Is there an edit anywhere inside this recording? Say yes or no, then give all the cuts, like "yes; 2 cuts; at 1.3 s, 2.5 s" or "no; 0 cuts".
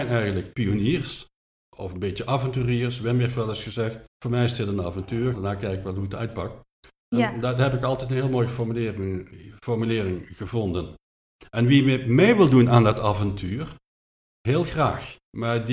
yes; 2 cuts; at 4.1 s, 5.3 s